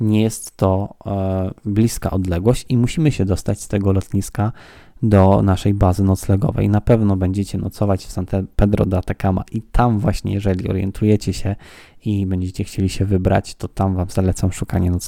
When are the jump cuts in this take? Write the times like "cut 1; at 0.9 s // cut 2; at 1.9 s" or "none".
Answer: none